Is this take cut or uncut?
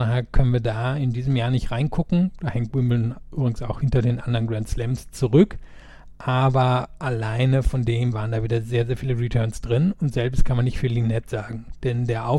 cut